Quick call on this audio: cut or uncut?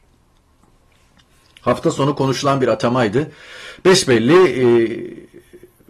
uncut